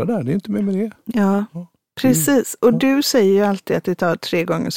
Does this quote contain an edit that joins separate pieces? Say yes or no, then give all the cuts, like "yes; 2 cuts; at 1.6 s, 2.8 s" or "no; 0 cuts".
no; 0 cuts